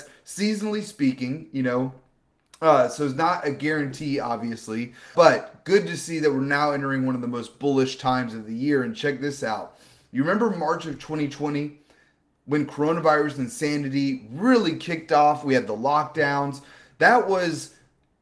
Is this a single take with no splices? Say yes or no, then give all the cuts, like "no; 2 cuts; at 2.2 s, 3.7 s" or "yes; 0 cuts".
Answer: no; 1 cut; at 5.1 s